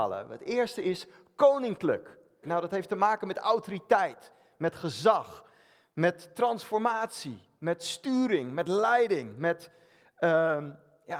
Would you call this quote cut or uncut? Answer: cut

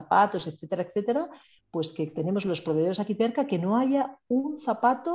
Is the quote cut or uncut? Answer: uncut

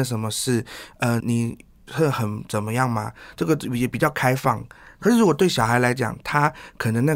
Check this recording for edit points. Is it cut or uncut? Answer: cut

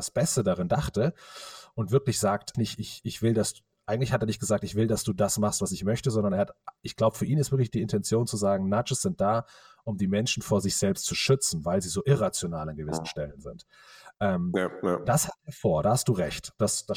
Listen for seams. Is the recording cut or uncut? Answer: cut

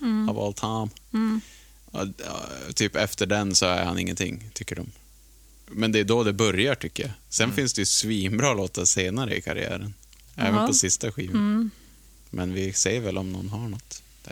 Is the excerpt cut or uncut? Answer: uncut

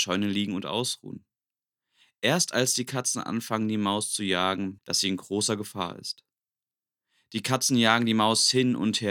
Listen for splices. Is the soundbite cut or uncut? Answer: cut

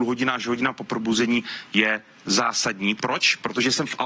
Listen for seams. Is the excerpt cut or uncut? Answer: uncut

